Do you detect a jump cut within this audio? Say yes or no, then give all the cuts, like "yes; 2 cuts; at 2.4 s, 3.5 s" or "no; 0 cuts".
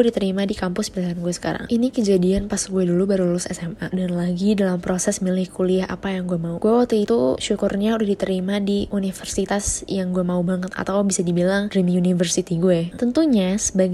yes; 2 cuts; at 1.7 s, 12.9 s